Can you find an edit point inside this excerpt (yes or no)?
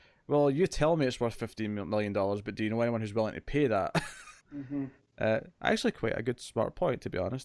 yes